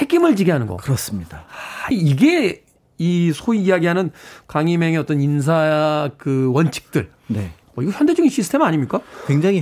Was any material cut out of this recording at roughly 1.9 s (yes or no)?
yes